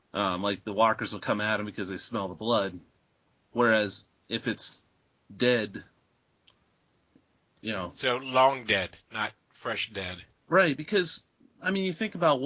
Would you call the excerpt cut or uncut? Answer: uncut